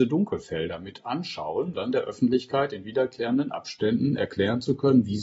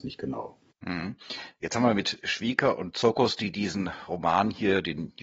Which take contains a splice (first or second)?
first